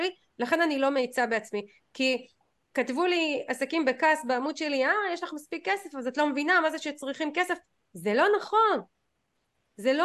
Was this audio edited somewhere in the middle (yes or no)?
no